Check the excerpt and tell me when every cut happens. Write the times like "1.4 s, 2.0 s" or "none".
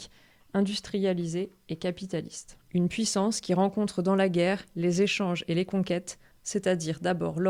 2.6 s, 6.3 s